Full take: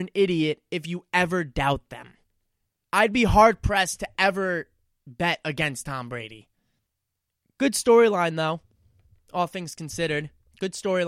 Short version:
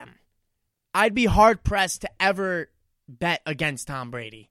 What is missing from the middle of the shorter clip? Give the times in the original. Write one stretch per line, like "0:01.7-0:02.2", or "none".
none